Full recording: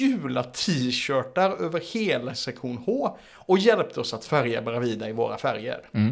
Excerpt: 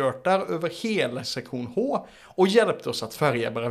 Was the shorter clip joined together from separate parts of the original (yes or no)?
no